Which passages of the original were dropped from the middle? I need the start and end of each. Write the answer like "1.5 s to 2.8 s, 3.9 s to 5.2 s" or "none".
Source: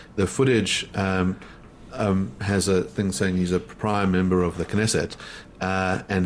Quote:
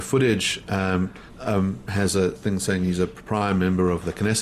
1.6 s to 1.8 s